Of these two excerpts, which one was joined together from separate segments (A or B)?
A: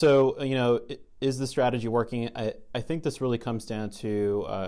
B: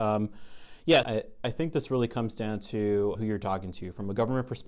B